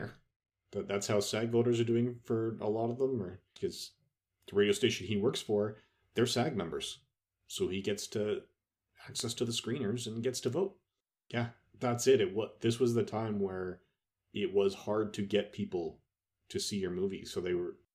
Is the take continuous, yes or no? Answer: no